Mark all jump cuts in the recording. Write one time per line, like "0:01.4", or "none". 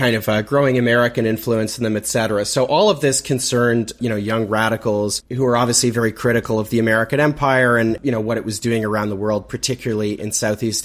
none